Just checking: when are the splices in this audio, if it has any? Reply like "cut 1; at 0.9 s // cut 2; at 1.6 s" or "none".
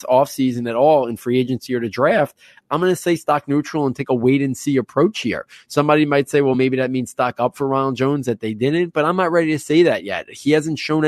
none